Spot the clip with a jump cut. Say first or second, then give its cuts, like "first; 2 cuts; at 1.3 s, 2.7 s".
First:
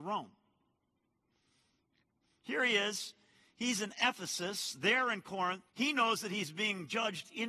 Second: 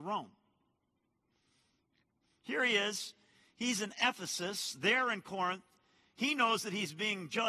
first; 1 cut; at 5.7 s